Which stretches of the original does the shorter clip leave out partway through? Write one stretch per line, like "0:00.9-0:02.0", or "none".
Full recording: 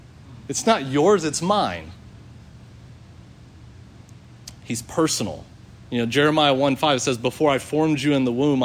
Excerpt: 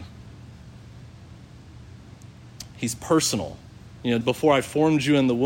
0:06.1-0:07.2

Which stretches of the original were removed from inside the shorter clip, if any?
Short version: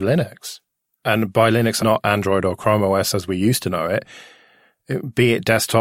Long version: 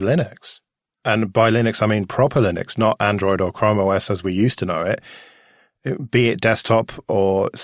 0:01.8-0:02.8

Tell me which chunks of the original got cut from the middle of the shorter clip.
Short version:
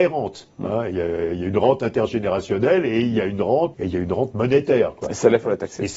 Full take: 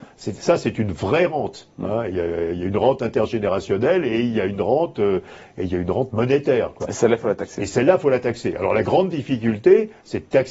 0:04.9-0:05.5

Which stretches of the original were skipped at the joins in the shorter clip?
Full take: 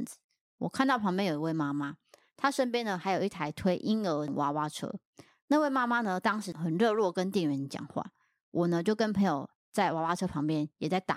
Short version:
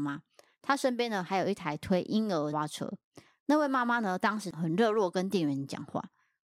0:04.3-0:04.5

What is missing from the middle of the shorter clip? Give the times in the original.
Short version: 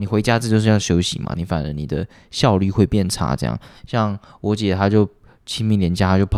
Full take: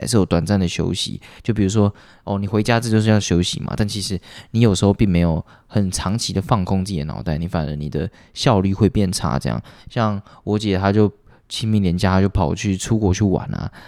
0:03.8-0:07.4

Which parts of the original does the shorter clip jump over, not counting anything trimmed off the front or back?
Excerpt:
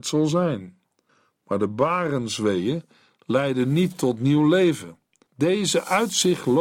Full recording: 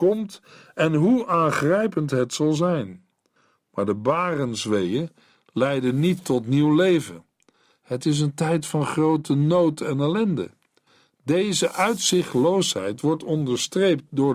0:07.5-0:11.1

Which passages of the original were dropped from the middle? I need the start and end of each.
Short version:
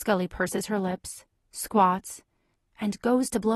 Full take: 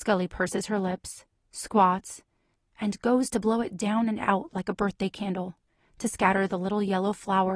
none

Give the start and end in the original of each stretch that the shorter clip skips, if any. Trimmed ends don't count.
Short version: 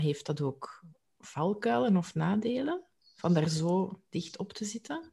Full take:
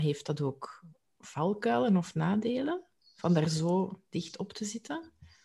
none

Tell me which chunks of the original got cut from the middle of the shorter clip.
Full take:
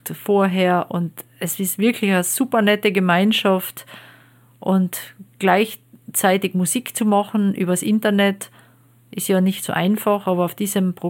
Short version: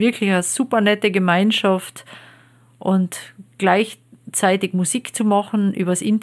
none

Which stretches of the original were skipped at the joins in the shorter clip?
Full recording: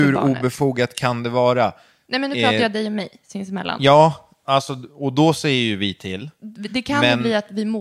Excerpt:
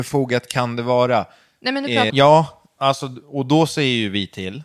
0:02.6-0:03.8

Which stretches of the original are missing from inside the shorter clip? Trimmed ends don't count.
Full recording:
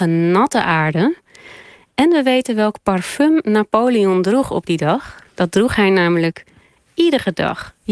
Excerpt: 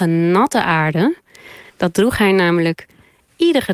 0:01.7-0:05.3

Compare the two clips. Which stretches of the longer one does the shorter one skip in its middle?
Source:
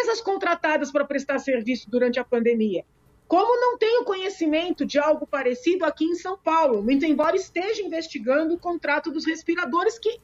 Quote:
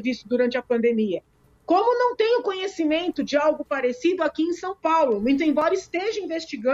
none

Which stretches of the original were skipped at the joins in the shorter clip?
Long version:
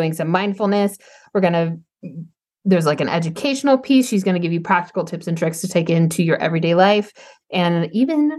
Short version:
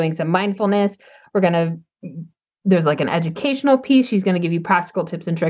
none

